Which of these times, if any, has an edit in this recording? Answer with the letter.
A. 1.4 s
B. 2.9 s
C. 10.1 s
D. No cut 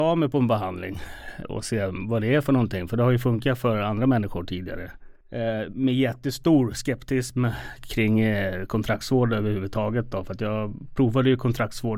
A